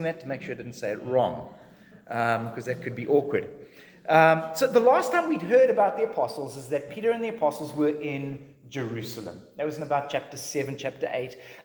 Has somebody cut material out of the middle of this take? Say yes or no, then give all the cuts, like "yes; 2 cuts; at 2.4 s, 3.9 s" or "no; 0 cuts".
no; 0 cuts